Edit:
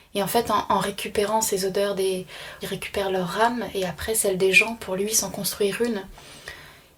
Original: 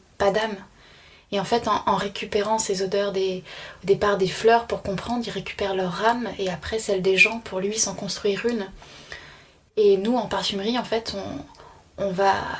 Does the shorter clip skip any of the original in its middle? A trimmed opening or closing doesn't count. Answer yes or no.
yes